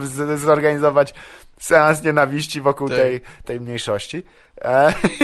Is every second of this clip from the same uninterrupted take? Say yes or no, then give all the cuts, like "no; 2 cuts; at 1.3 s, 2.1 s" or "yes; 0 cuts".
no; 1 cut; at 3.4 s